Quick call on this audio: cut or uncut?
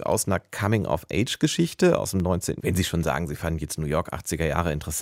cut